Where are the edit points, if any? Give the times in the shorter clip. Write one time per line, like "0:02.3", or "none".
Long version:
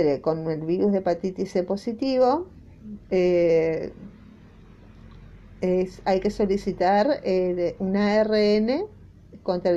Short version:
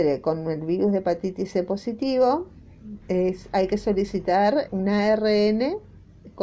0:03.0
0:04.7